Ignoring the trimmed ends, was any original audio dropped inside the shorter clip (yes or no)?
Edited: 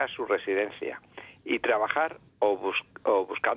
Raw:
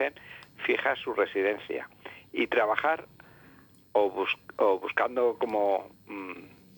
yes